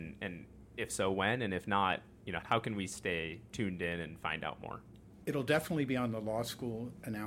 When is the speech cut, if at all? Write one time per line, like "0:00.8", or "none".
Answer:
0:02.4